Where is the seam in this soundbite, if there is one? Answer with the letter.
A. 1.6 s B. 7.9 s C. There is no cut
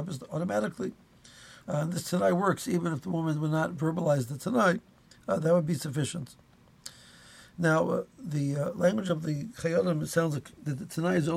A